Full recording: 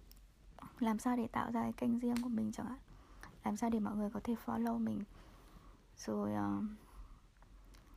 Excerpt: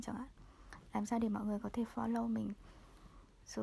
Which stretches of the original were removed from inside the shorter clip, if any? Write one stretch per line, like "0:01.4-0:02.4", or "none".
none